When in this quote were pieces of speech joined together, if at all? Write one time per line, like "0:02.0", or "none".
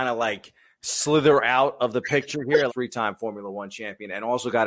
0:02.7